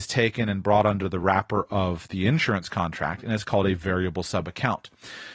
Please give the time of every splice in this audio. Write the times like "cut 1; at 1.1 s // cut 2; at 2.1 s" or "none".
none